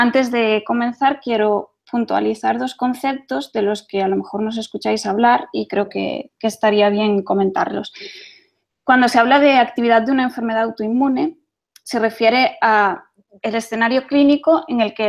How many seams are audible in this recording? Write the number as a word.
zero